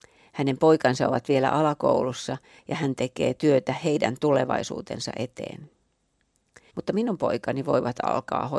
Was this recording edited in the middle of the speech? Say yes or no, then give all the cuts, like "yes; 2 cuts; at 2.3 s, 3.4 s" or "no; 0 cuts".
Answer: yes; 1 cut; at 6.7 s